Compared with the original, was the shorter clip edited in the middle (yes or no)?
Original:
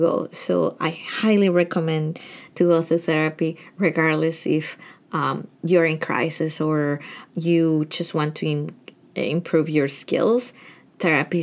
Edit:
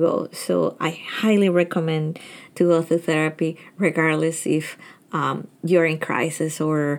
no